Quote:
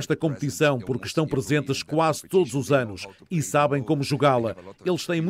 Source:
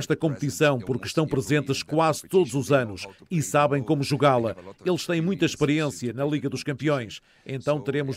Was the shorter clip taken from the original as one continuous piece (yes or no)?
yes